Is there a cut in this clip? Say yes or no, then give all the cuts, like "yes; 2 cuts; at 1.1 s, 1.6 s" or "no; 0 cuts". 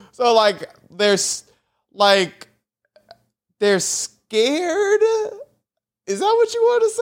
no; 0 cuts